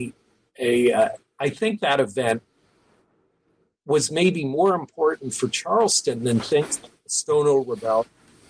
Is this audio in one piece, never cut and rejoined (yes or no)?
yes